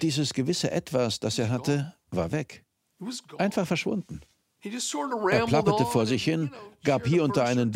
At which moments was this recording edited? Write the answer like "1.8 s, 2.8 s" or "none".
none